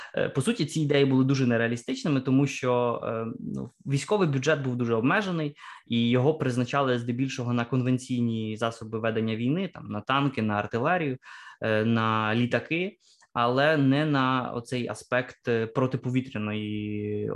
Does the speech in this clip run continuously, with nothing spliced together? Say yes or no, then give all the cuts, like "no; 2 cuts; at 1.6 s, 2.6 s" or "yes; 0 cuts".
yes; 0 cuts